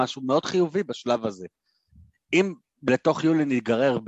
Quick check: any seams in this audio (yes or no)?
no